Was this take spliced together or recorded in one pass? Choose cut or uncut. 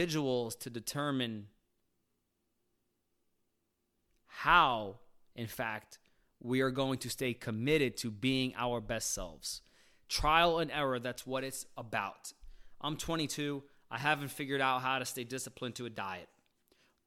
uncut